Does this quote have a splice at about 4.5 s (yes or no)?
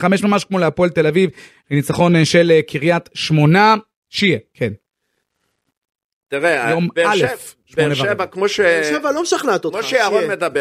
yes